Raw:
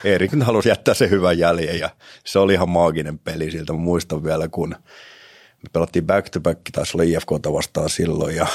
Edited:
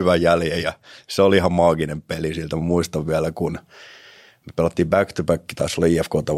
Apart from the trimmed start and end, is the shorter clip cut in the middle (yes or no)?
no